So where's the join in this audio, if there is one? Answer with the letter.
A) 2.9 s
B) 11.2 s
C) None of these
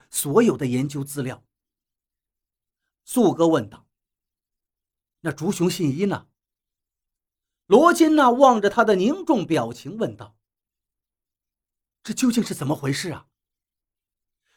A